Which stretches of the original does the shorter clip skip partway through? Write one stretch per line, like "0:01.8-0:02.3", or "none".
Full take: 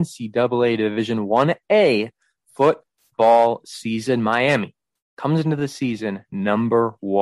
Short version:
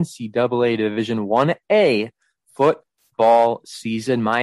none